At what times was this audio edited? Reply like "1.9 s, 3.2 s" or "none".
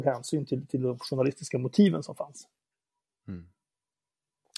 none